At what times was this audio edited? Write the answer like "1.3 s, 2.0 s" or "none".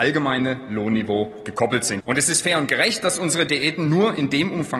2.0 s

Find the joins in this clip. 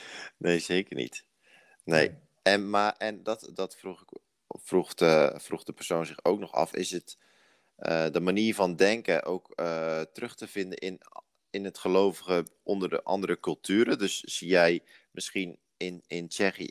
none

